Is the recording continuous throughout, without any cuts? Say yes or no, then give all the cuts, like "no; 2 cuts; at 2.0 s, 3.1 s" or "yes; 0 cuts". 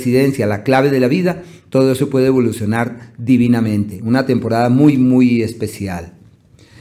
yes; 0 cuts